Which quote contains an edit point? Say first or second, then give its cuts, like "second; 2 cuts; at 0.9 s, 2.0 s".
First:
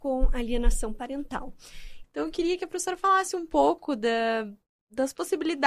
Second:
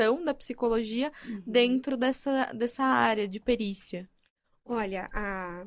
first; 1 cut; at 2.0 s